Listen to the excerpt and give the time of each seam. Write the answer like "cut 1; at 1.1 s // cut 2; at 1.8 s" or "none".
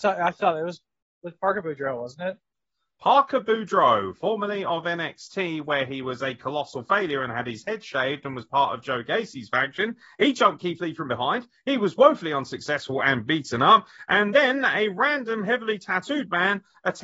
none